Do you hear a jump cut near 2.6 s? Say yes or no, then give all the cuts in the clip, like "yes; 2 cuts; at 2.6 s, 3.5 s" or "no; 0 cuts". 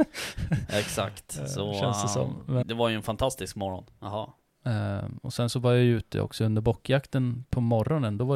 yes; 2 cuts; at 2.6 s, 3.9 s